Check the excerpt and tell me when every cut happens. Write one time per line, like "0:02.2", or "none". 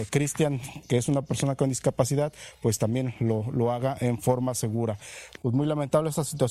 0:05.4